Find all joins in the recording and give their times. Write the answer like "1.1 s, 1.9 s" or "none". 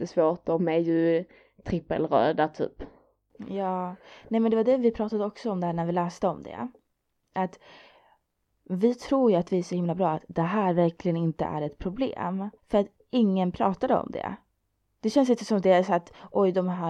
12.6 s